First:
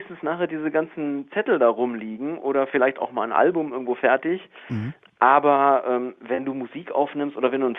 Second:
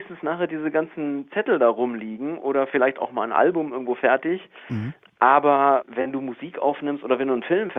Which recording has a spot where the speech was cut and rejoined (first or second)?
second